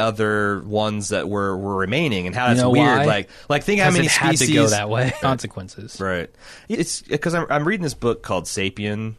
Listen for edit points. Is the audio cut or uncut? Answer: cut